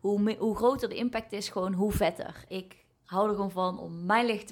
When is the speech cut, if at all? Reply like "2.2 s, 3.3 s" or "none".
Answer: 2.5 s